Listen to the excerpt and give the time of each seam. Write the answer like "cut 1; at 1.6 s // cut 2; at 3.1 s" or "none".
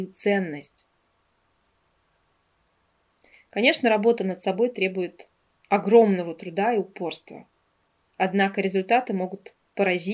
none